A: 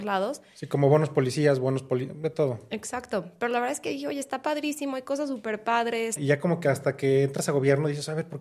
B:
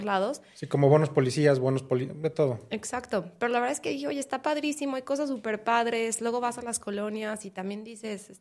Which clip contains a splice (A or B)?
A